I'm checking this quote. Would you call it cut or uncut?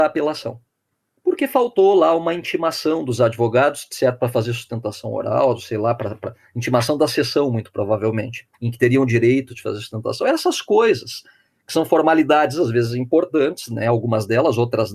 uncut